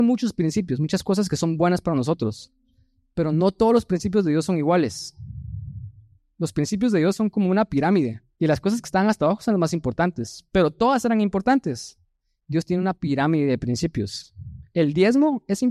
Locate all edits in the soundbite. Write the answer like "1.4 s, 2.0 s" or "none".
8.3 s